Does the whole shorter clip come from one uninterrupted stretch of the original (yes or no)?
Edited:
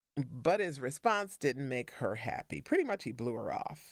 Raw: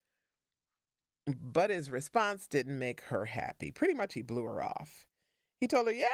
yes